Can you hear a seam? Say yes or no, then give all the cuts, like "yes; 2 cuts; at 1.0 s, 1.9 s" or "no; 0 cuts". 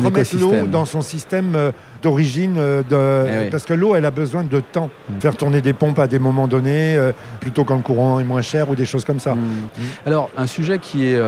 yes; 2 cuts; at 5.2 s, 9.7 s